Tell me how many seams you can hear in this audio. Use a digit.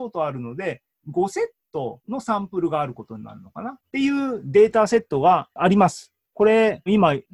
0